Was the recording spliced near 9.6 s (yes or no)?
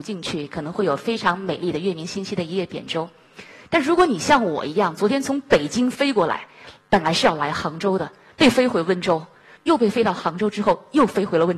yes